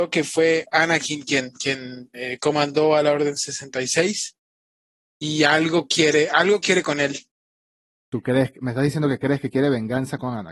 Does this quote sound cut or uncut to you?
uncut